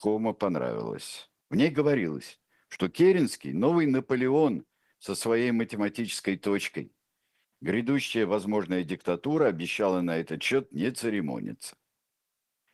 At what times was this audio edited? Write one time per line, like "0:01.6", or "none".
0:01.4
0:07.5